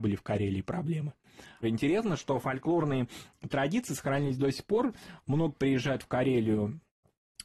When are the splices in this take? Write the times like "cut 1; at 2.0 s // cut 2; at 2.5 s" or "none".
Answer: cut 1; at 1.6 s